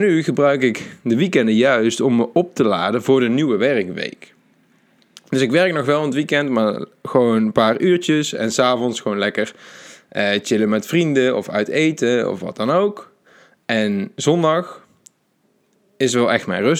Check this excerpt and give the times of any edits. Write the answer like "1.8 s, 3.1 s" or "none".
none